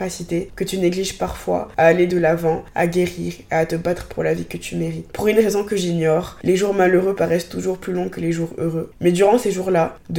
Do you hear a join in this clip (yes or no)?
yes